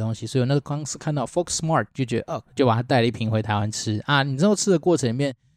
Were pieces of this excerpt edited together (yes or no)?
yes